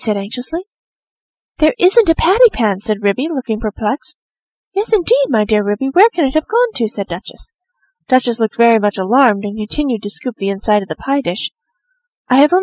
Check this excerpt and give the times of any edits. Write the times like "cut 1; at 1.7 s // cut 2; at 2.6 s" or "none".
none